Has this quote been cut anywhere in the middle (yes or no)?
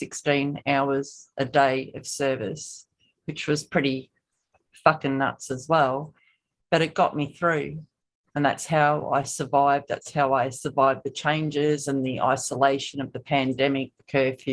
no